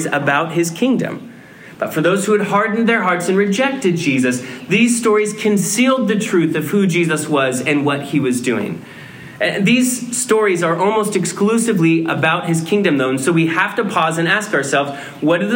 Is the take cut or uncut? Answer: cut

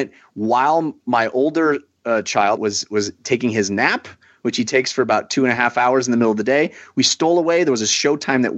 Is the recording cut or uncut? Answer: cut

